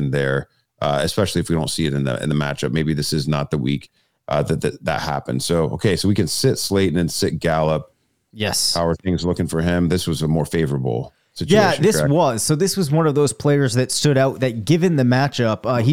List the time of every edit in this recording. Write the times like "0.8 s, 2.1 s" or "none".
8.3 s